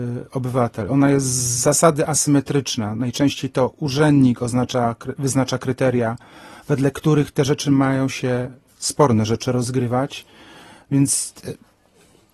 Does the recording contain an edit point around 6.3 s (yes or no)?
no